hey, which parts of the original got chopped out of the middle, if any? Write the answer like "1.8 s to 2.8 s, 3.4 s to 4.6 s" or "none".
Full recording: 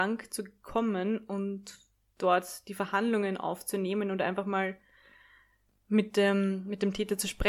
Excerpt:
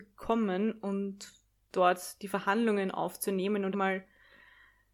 4.2 s to 4.4 s